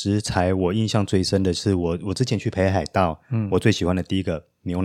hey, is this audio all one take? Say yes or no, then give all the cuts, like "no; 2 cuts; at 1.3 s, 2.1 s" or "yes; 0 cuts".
yes; 0 cuts